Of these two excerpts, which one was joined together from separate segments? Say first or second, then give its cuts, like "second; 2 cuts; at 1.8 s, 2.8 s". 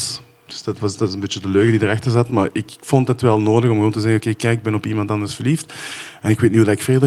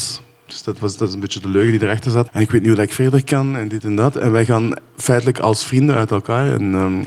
second; 1 cut; at 2.3 s